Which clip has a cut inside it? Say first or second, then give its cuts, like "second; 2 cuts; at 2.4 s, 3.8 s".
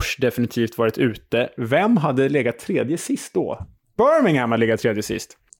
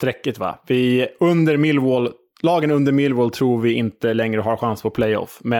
first; 1 cut; at 3.6 s